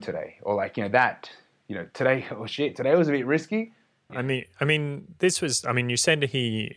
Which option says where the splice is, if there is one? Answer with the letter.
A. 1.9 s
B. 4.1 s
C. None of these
B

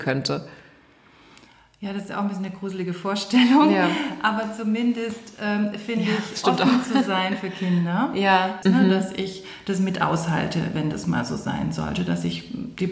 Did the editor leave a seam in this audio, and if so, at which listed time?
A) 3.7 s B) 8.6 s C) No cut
B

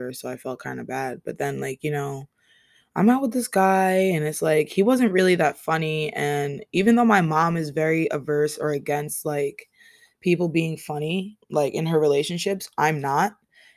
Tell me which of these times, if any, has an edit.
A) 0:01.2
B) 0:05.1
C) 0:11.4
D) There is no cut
C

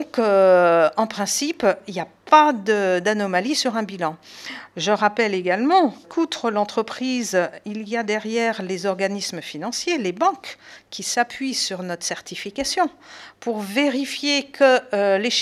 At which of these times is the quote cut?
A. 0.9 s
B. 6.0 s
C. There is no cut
B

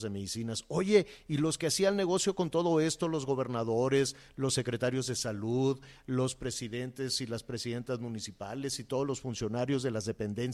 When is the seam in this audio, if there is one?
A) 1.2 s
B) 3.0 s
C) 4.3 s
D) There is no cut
D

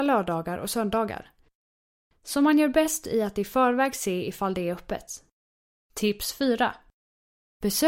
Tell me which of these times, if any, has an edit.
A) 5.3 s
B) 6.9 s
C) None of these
C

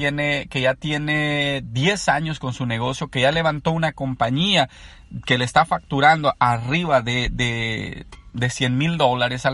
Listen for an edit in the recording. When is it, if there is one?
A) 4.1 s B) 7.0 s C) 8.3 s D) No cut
D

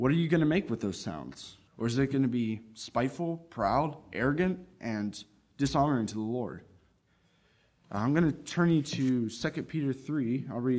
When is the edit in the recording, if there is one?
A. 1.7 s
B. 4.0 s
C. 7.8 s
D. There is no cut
A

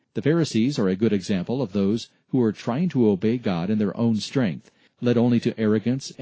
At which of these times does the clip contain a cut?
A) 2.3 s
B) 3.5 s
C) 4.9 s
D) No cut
C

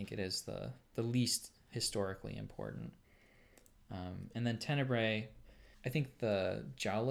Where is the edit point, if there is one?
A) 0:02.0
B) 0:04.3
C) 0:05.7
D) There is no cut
C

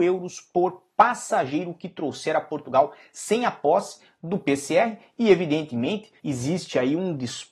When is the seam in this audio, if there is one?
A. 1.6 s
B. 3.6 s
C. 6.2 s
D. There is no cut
C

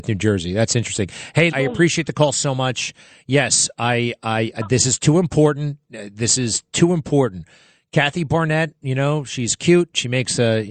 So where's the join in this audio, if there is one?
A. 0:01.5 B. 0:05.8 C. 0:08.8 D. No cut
A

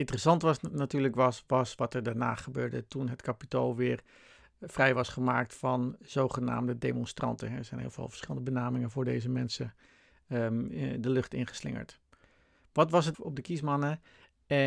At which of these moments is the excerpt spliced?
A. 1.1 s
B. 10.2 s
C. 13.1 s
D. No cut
C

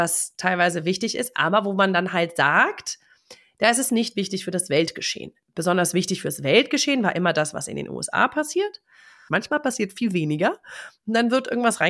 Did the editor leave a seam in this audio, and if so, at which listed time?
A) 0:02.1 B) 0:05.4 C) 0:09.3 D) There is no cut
C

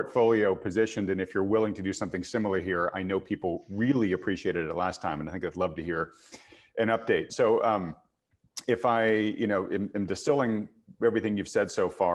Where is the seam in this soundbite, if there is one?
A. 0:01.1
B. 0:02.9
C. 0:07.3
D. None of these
C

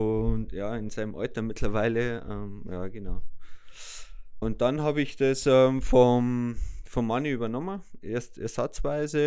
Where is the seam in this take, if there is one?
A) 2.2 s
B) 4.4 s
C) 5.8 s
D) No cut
B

